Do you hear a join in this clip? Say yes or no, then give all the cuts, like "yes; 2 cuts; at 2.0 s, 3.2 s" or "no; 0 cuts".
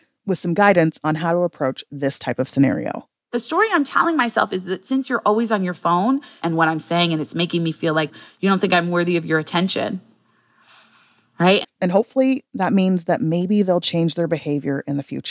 yes; 2 cuts; at 6.4 s, 11.6 s